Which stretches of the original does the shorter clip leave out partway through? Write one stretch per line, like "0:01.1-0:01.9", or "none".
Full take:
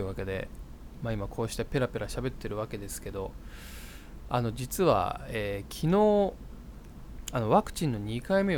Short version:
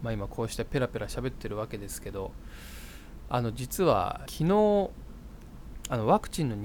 0:05.3-0:05.7

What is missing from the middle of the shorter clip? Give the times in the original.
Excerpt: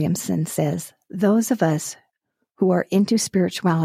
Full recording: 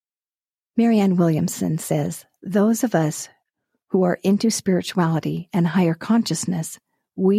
none

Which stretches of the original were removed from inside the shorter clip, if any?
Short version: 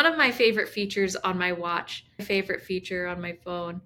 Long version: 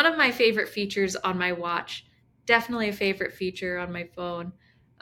0:02.2-0:02.9

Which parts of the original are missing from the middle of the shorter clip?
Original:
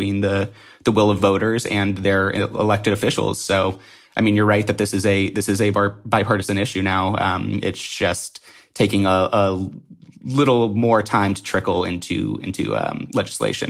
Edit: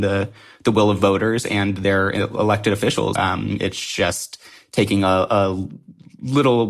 0:03.4-0:07.2

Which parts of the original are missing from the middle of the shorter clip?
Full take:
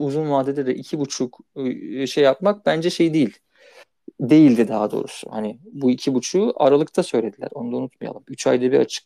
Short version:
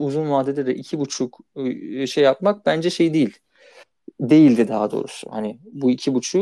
none

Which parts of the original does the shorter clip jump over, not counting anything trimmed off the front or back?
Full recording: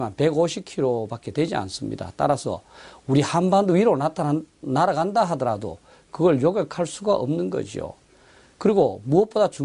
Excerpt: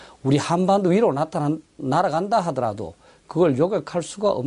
none

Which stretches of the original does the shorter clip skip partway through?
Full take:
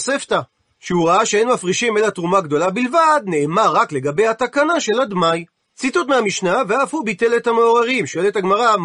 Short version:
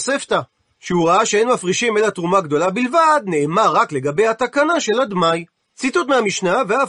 none

